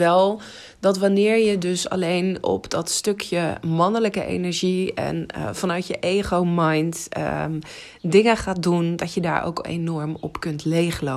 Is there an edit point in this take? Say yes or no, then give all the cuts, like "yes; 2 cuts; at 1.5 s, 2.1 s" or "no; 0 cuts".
no; 0 cuts